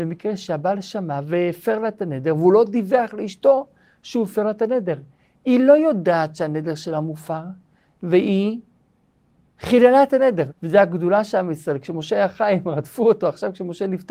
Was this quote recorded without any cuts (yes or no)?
no